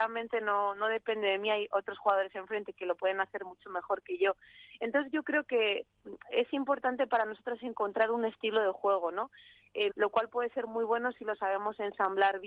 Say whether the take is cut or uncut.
cut